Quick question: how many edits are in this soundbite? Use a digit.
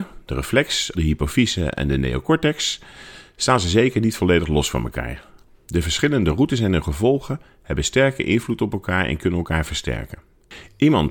1